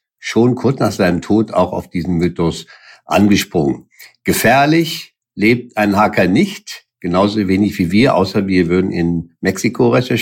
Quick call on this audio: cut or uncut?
uncut